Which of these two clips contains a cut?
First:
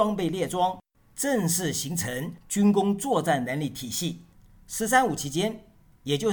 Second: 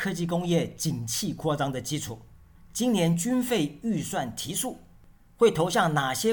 first; 1 cut; at 4.3 s

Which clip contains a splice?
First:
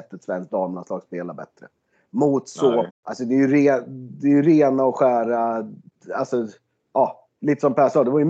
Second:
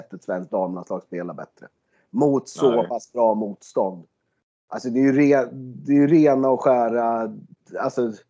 first; 1 cut; at 2.9 s

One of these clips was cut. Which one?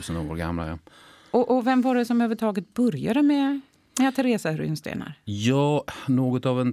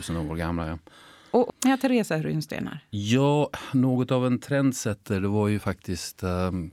second; 1 cut; at 1.5 s

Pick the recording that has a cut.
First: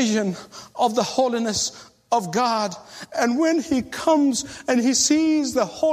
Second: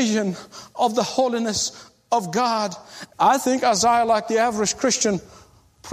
second; 1 cut; at 3.1 s

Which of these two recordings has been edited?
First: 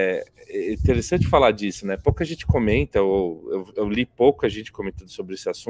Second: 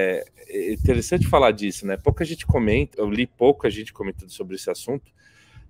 second; 1 cut; at 2.9 s

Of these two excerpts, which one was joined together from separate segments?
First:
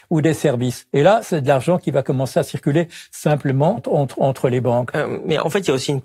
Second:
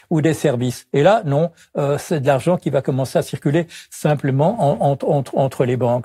first; 2 cuts; at 1.2 s, 3.8 s

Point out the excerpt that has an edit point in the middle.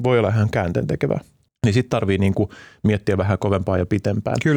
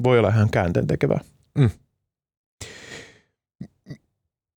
first; 1 cut; at 1.5 s

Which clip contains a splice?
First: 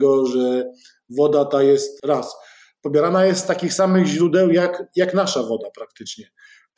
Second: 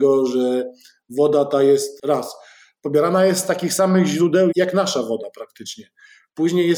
second; 1 cut; at 4.5 s

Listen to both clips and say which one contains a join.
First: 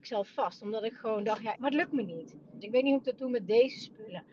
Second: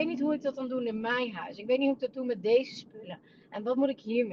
first; 2 cuts; at 1.5 s, 2.6 s

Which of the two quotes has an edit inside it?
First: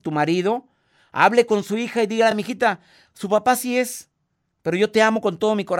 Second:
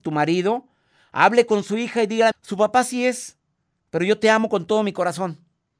second; 1 cut; at 2.3 s

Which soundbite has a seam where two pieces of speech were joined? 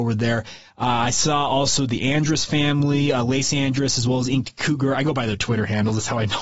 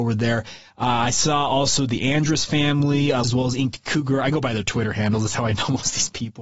second; 1 cut; at 3.2 s

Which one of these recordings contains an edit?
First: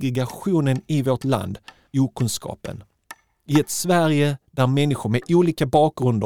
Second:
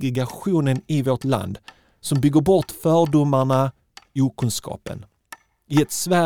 first; 1 cut; at 1.9 s

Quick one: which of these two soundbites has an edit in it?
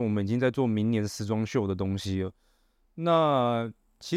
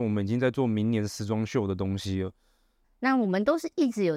second; 1 cut; at 2.8 s

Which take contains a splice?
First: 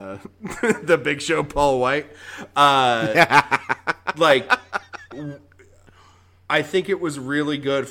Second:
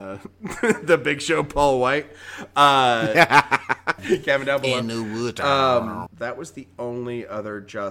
second; 2 cuts; at 4.0 s, 6.1 s

